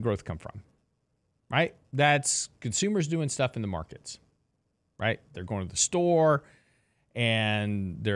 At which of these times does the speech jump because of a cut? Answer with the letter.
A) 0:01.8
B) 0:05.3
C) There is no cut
B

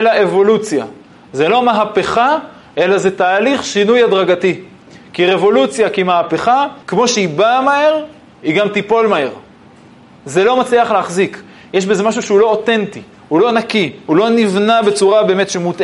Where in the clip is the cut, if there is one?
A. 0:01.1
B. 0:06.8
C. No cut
B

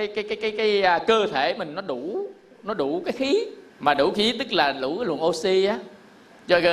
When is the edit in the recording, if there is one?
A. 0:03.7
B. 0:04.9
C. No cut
A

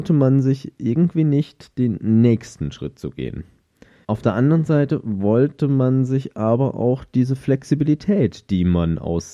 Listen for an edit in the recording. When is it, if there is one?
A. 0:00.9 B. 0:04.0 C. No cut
B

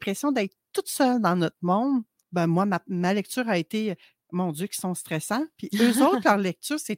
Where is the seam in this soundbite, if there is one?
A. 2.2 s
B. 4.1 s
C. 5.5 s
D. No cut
A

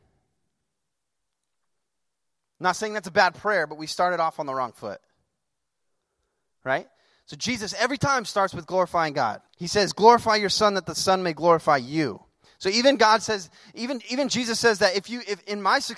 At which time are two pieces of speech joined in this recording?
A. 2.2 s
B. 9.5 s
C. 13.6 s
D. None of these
B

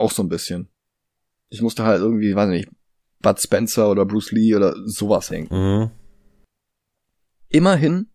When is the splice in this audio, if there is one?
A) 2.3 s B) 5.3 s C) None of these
B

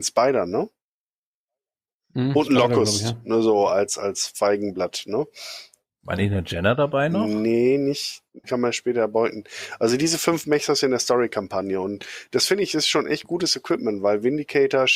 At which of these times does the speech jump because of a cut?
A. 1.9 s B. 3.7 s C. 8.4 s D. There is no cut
C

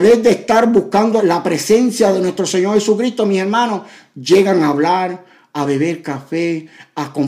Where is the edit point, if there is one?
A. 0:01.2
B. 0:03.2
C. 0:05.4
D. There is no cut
A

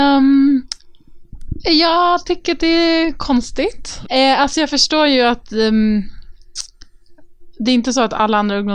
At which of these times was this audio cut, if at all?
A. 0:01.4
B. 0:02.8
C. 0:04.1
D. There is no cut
C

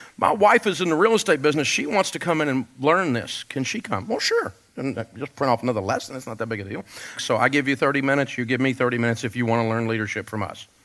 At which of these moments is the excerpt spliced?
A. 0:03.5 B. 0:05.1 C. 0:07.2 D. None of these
C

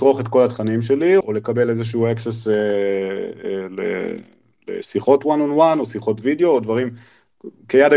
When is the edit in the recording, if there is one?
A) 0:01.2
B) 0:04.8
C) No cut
A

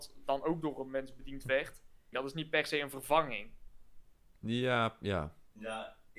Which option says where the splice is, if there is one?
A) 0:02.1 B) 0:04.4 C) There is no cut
A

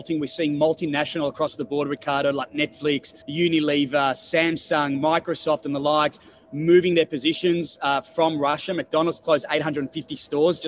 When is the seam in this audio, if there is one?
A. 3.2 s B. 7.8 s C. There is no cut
A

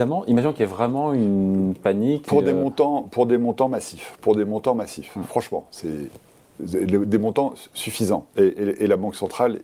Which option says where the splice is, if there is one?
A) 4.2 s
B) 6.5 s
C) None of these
C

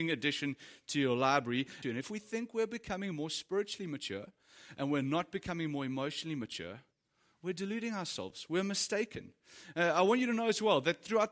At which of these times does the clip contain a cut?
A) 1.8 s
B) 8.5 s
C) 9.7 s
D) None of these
A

